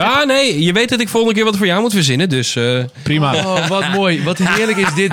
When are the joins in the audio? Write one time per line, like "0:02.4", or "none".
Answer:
none